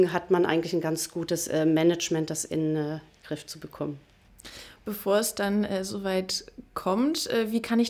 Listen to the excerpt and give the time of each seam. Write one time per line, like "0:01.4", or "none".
none